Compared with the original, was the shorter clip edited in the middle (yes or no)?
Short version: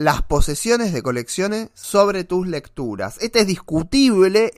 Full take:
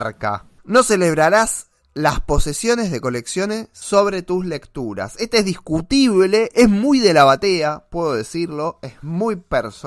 no